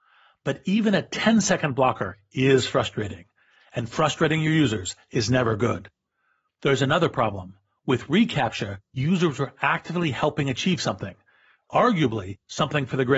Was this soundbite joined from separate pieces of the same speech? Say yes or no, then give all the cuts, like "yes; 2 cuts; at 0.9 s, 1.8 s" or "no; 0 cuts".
no; 0 cuts